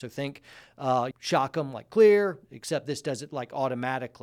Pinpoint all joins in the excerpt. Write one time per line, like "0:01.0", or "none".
0:01.1